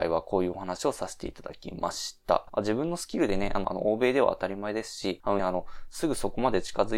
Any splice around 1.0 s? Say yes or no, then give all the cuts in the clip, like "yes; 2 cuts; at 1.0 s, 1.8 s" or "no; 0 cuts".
no; 3 cuts; at 2.5 s, 3.6 s, 5.4 s